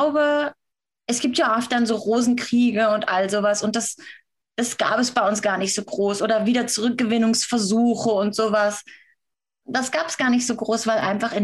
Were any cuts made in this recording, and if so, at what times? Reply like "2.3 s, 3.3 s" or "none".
none